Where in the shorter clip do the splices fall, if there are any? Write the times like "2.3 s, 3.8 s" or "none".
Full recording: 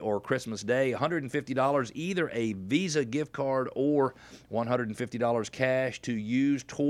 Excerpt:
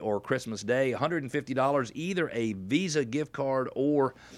none